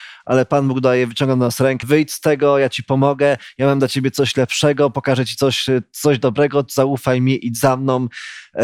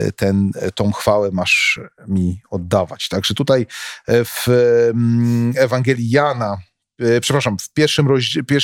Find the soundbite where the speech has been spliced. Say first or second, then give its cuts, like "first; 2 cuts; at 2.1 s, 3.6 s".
first; 1 cut; at 1.8 s